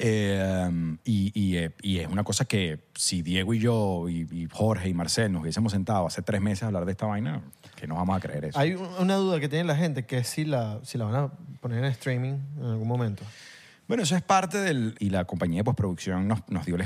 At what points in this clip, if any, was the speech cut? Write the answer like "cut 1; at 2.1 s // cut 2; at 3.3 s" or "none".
cut 1; at 14.9 s